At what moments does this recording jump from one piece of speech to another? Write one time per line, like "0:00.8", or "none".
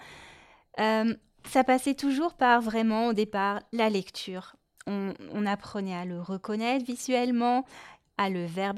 none